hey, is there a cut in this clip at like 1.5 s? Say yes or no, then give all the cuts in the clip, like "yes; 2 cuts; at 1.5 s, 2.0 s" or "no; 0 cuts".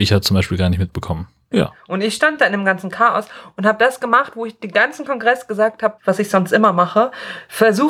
yes; 2 cuts; at 1.5 s, 6.0 s